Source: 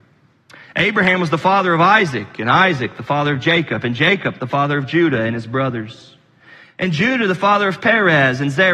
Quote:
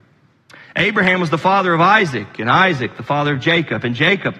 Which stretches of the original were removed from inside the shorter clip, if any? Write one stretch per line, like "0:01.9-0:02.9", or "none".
none